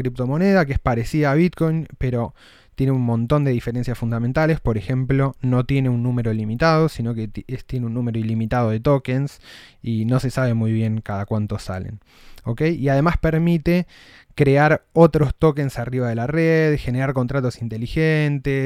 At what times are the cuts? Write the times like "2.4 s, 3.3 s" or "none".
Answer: none